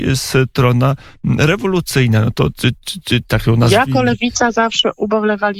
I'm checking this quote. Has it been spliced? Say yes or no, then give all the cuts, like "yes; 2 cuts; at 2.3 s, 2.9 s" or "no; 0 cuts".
no; 0 cuts